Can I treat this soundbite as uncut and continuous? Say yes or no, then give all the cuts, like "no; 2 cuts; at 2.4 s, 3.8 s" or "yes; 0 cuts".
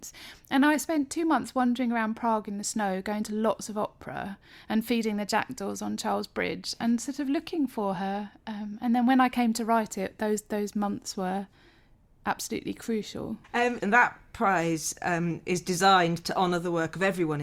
no; 1 cut; at 13.8 s